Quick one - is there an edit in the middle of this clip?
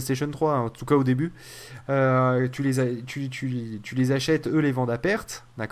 no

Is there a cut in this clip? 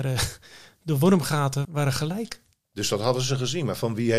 yes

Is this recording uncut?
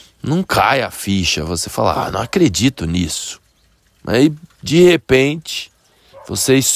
yes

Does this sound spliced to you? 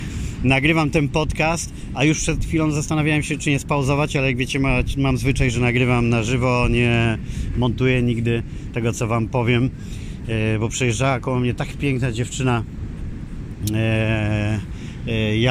no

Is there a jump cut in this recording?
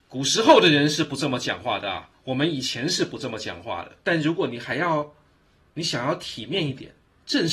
yes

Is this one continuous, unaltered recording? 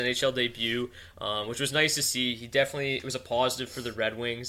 yes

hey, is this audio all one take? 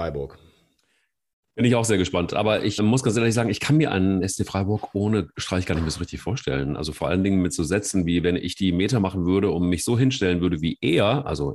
no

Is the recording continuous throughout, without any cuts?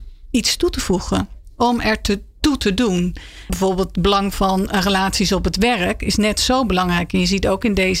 no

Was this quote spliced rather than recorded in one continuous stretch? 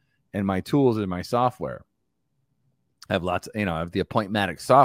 no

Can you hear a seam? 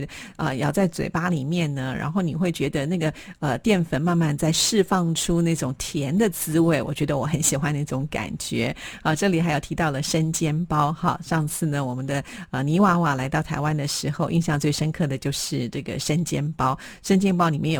no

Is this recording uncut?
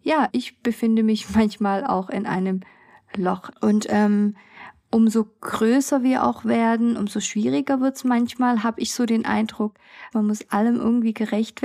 no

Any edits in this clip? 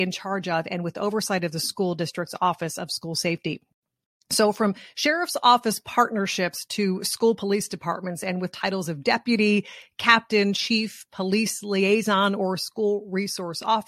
no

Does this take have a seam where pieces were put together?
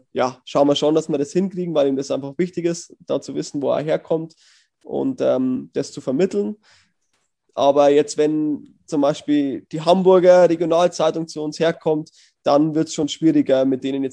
no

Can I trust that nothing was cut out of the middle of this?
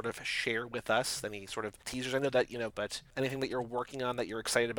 no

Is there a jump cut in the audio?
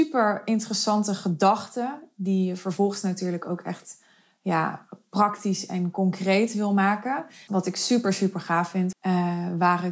yes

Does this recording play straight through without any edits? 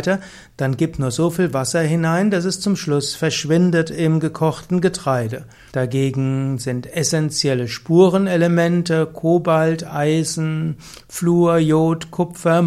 no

